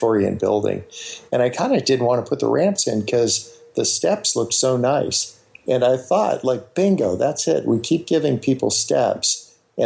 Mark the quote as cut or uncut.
uncut